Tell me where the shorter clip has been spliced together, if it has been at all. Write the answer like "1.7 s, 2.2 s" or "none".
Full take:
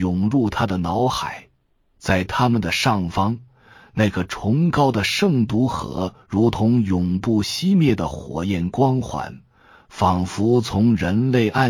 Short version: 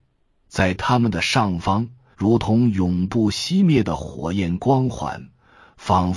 2.1 s